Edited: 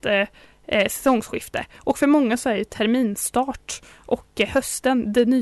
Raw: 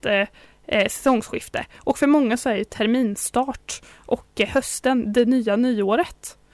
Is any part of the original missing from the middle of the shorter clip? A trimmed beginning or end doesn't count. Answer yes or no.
no